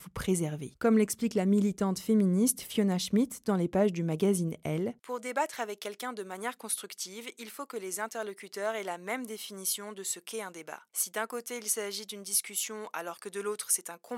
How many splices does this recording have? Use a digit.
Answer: 0